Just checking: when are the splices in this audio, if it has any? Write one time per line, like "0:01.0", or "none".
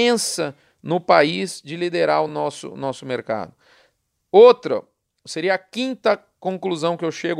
none